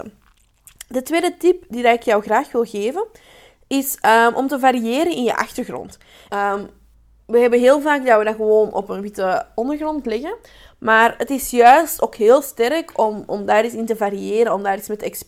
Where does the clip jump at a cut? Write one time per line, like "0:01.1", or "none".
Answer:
0:06.3